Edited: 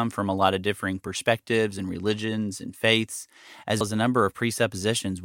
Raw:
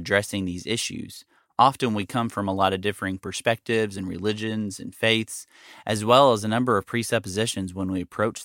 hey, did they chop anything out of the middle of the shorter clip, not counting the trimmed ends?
yes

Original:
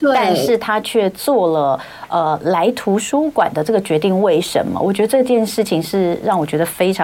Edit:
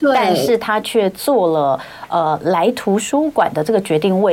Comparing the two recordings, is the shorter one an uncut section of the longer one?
yes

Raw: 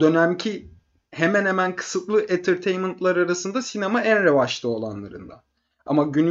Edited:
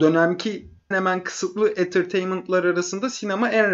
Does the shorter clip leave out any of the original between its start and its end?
yes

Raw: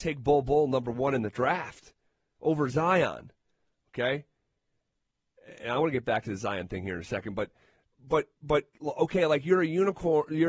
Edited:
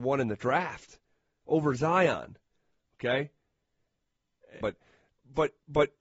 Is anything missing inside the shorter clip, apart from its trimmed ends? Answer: yes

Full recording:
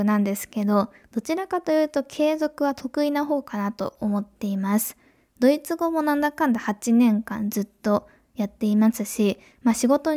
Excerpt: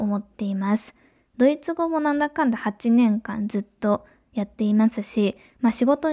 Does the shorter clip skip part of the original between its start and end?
no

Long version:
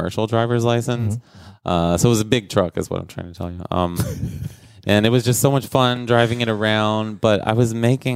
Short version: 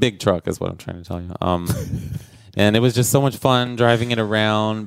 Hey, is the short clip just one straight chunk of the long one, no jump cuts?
yes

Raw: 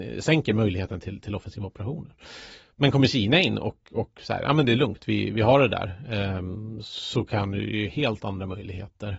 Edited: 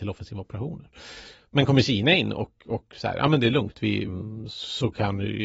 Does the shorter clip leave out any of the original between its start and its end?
yes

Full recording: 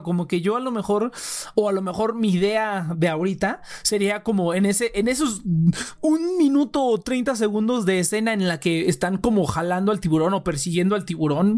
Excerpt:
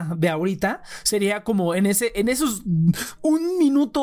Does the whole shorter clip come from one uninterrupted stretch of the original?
yes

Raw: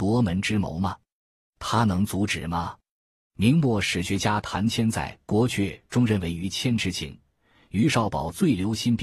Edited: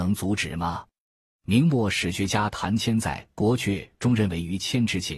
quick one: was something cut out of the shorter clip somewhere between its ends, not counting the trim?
no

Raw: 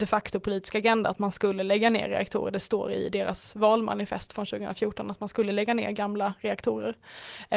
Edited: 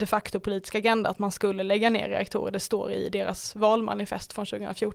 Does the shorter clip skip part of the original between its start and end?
no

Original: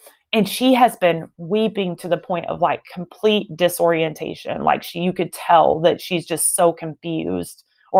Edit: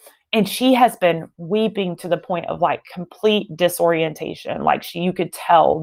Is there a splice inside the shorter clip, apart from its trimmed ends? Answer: no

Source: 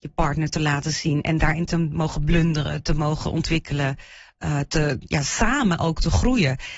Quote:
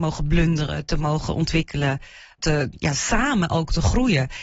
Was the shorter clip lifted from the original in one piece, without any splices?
no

